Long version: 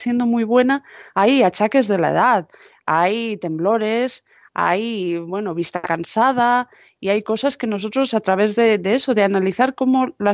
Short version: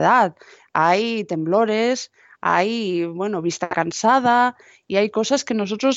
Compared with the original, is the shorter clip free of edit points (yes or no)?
yes